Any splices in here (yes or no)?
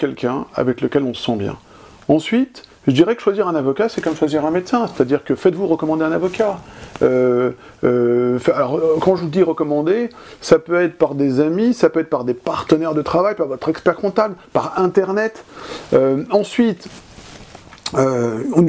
no